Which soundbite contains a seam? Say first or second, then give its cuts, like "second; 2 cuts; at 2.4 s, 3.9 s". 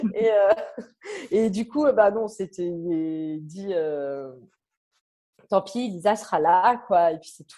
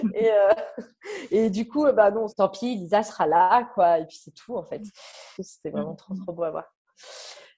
second; 2 cuts; at 2.3 s, 5.4 s